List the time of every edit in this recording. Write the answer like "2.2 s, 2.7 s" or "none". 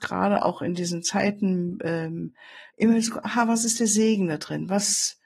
2.7 s